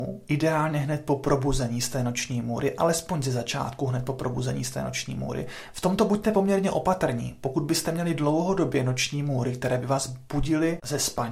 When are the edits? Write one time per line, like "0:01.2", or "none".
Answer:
none